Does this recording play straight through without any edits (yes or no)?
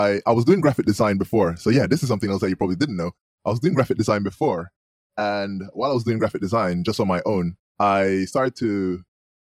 no